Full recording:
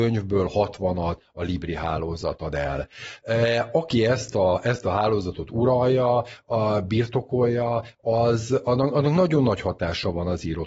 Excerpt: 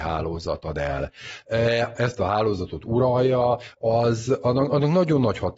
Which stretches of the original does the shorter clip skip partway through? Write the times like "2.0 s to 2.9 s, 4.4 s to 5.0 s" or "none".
3.7 s to 4.6 s, 6.4 s to 8.0 s